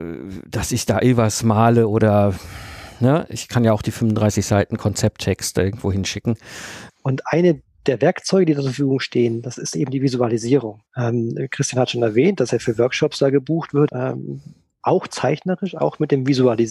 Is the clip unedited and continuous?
no; 3 cuts; at 6.9 s, 10.9 s, 13.9 s

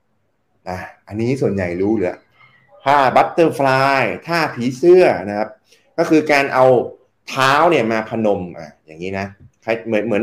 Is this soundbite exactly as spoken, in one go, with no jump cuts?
yes; 0 cuts

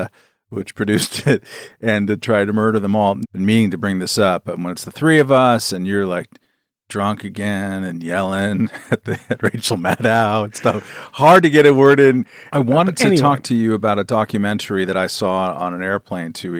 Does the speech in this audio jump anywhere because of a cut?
yes; 2 cuts; at 3.2 s, 12.5 s

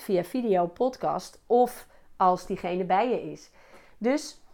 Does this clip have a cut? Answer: no; 0 cuts

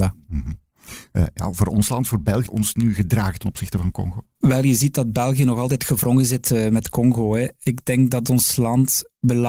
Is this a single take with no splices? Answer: no; 1 cut; at 2.5 s

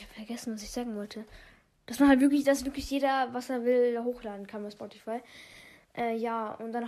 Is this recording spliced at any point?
no; 0 cuts

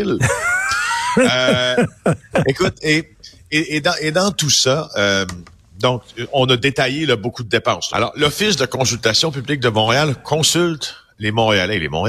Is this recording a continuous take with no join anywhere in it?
no; 1 cut; at 7.9 s

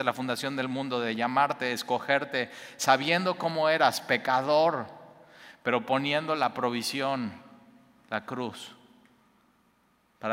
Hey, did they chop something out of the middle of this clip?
no; 0 cuts

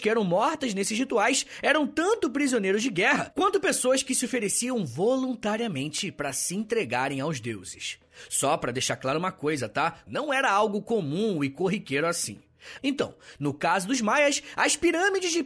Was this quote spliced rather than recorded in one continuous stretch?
yes; 2 cuts; at 10.1 s, 12.8 s

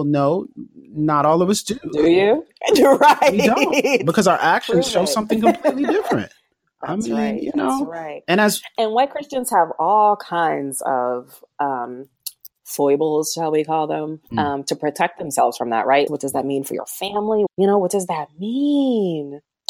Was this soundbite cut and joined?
yes; 2 cuts; at 16.1 s, 17.5 s

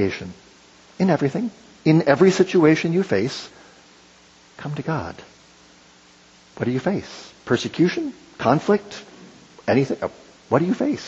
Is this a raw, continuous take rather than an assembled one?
yes; 0 cuts

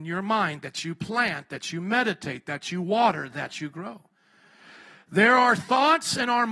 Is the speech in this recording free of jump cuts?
yes; 0 cuts

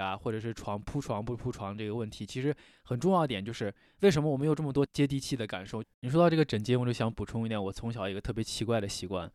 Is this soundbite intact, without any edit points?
no; 1 cut; at 5.8 s

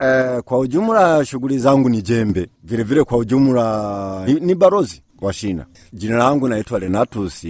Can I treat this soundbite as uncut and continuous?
no; 2 cuts; at 4.3 s, 5.9 s

